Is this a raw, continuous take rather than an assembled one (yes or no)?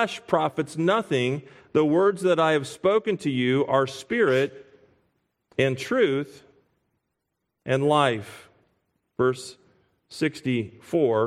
yes